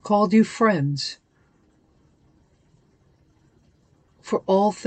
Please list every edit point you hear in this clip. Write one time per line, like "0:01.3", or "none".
none